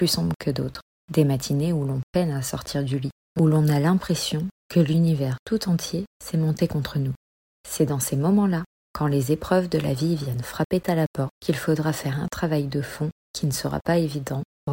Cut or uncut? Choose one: uncut